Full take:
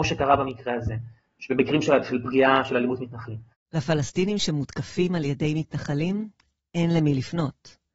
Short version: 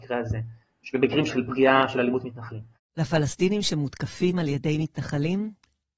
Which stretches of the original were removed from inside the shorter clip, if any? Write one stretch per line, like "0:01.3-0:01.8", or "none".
0:01.8-0:02.0